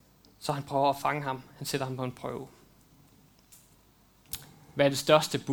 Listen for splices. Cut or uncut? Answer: uncut